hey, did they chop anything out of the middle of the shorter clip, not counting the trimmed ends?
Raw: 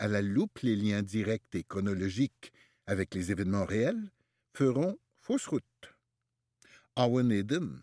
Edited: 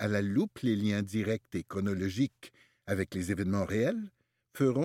no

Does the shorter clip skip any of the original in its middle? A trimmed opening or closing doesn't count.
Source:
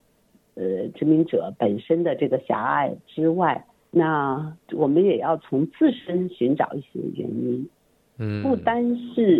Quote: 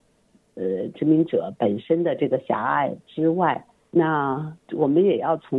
no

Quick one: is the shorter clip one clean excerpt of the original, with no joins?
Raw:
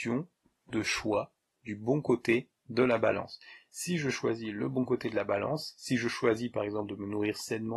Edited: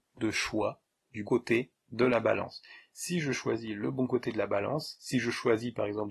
no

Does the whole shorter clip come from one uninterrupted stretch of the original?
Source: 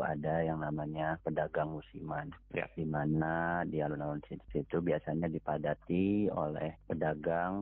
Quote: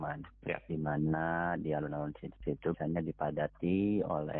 no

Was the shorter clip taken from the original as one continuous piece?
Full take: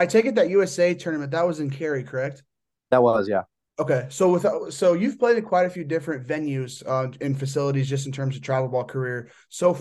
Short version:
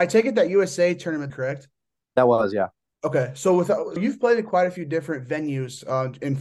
no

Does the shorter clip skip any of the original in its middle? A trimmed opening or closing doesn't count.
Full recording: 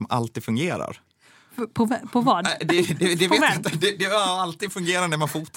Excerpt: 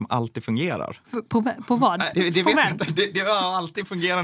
yes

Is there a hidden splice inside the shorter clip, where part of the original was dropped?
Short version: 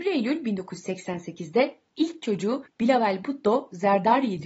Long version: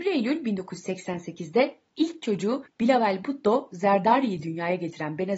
no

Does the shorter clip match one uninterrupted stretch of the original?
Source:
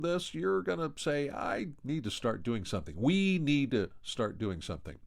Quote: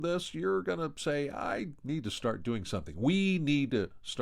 yes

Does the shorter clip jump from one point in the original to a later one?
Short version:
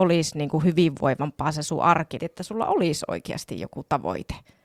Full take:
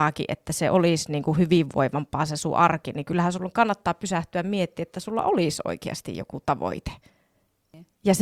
yes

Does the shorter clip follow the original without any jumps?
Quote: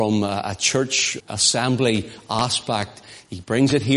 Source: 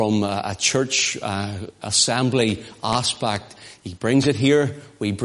no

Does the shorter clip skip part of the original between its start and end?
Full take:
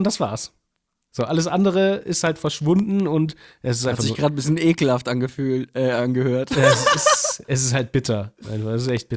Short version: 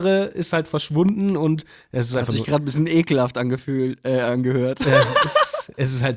no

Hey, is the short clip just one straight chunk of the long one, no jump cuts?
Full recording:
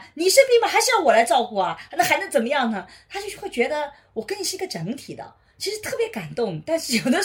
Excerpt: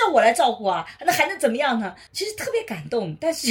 no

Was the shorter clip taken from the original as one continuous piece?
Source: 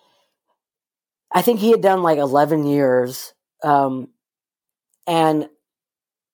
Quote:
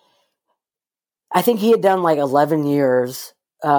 yes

